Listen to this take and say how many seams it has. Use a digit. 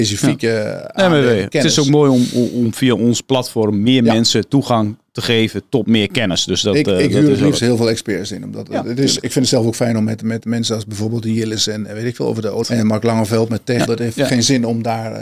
2